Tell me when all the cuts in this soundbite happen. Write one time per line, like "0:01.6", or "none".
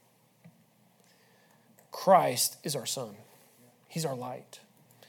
none